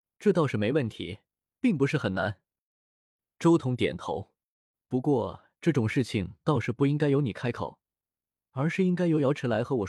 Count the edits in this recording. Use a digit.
0